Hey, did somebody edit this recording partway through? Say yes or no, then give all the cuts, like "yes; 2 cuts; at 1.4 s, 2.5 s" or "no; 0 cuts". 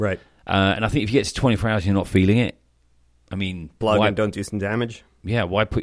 yes; 1 cut; at 3.8 s